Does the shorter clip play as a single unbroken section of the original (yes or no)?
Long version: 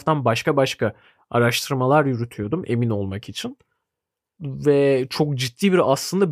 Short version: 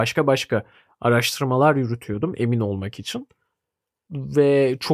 yes